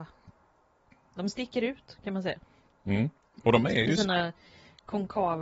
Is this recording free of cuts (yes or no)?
yes